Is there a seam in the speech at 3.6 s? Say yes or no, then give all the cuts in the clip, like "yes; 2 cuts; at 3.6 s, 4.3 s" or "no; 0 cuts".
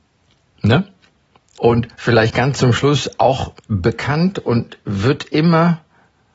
yes; 2 cuts; at 1.6 s, 3.6 s